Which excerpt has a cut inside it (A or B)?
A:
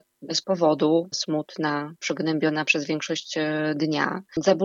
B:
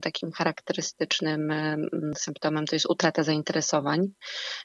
A